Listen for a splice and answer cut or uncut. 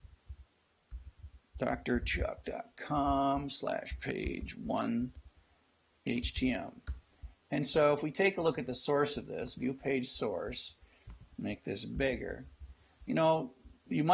uncut